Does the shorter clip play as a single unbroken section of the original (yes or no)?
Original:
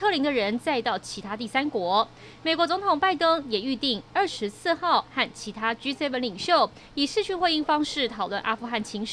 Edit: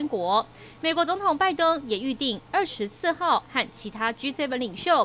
yes